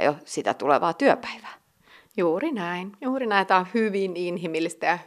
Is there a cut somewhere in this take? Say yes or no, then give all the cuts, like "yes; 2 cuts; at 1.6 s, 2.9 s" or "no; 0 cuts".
no; 0 cuts